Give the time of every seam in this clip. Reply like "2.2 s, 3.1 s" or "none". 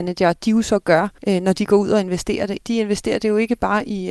1.2 s, 2.6 s